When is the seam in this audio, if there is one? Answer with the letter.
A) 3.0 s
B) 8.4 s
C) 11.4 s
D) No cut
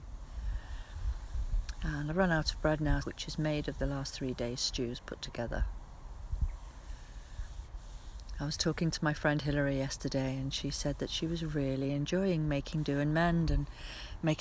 A